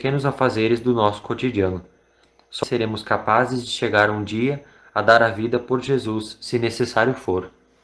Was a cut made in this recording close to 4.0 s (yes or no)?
no